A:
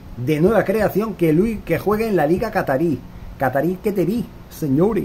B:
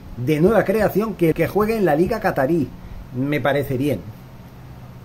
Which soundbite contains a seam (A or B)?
B